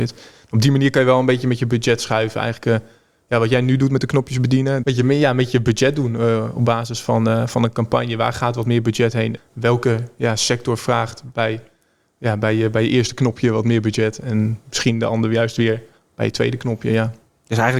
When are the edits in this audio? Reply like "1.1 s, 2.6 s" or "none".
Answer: 4.8 s